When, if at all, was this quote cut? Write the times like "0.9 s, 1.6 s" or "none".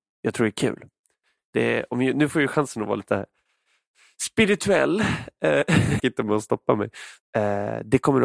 6.0 s, 7.2 s